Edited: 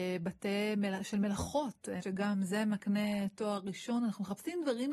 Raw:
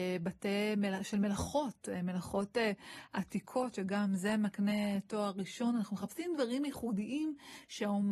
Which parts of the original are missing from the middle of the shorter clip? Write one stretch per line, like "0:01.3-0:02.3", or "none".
0:02.0-0:03.7